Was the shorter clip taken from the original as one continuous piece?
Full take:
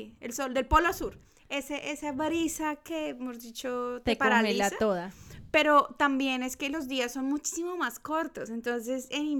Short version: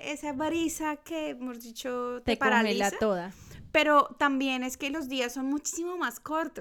yes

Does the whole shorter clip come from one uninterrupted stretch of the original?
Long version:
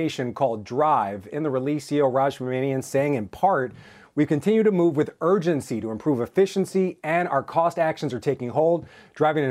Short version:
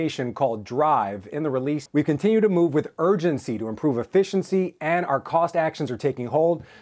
no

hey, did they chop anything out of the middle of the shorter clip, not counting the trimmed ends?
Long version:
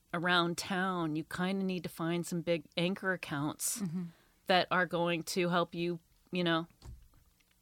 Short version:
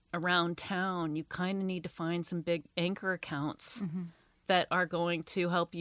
no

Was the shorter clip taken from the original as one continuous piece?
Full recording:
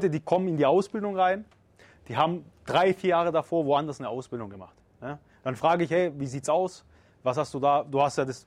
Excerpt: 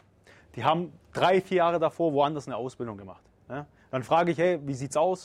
yes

